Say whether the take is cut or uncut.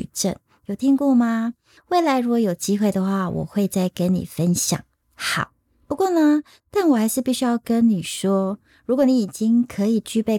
cut